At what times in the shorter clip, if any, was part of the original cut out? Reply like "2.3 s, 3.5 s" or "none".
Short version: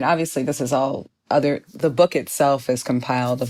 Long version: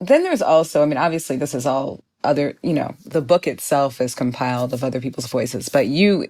1.7 s